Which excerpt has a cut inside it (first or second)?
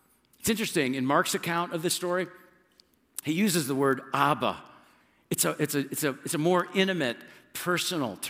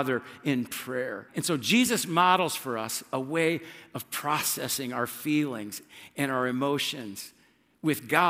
second